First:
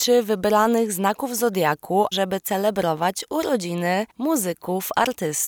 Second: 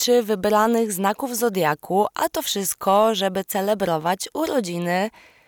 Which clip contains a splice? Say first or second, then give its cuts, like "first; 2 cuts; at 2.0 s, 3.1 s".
first; 2 cuts; at 2.1 s, 4.1 s